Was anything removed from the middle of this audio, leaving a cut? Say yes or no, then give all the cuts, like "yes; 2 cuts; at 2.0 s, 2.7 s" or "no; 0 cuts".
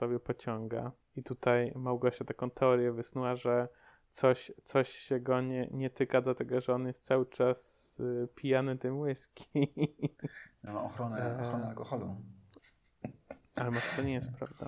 yes; 2 cuts; at 10.7 s, 12.6 s